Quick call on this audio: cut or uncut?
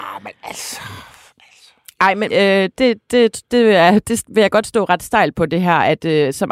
cut